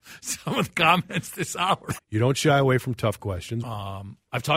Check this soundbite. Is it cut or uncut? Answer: cut